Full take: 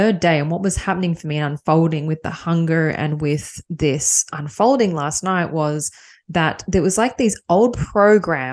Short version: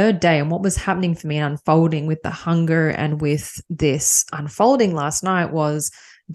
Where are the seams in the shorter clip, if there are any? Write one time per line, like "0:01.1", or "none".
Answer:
none

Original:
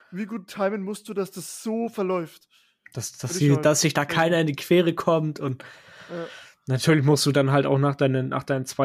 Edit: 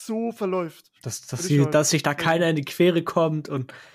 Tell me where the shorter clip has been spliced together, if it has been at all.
0:01.0

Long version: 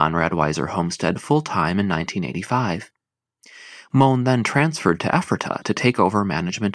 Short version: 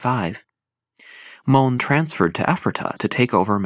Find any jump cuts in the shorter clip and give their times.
0:01.8

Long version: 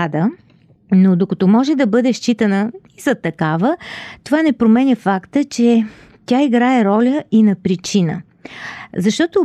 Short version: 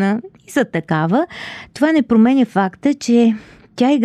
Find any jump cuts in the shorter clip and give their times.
none

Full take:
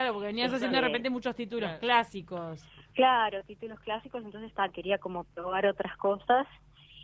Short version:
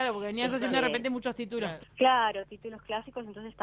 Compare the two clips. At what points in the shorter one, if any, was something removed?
0:01.8

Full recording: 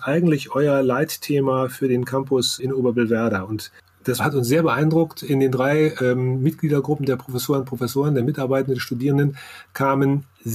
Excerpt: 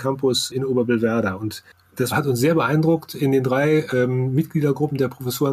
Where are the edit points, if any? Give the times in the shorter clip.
none

